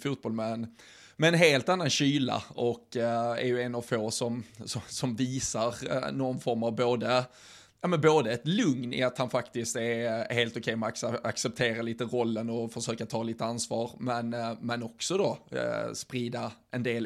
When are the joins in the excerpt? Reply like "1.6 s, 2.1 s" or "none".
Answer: none